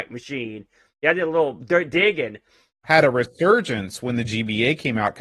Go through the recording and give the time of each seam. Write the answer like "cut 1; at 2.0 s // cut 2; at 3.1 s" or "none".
cut 1; at 2.8 s